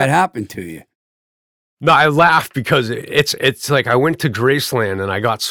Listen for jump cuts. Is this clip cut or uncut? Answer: uncut